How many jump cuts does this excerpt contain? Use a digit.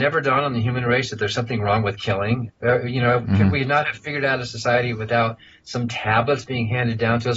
1